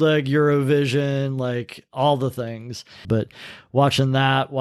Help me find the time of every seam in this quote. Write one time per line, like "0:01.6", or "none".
0:03.0